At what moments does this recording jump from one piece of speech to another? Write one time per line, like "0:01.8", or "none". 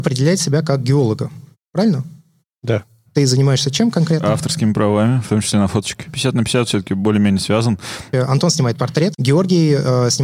0:03.1
0:08.1
0:09.1